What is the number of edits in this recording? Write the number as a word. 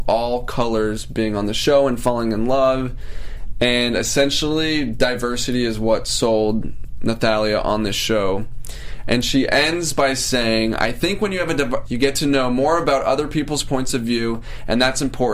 one